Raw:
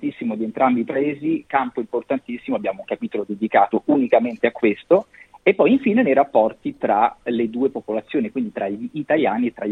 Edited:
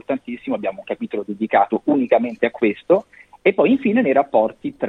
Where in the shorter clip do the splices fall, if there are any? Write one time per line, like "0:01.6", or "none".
none